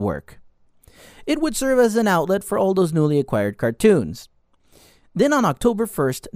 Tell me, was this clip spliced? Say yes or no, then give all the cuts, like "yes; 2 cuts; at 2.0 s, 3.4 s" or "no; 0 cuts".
no; 0 cuts